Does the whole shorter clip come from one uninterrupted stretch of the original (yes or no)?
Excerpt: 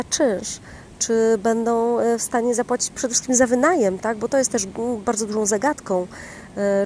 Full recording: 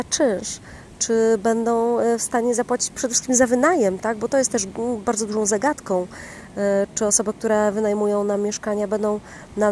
yes